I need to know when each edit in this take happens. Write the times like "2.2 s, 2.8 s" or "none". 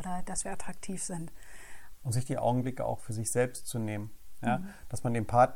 2.0 s